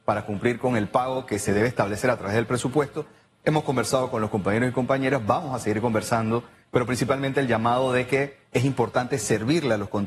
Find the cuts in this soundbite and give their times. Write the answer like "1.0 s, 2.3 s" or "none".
none